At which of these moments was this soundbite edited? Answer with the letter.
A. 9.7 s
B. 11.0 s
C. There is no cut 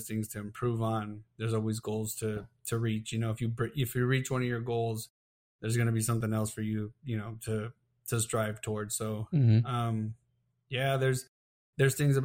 C